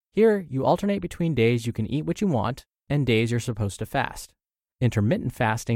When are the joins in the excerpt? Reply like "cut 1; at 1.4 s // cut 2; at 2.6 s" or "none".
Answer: cut 1; at 4.7 s